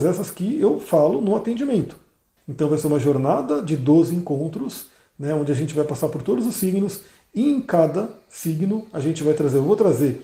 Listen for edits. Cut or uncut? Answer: cut